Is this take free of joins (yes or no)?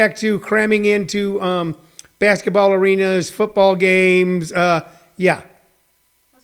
yes